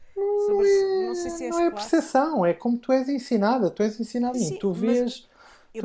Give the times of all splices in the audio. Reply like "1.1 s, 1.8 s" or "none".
4.3 s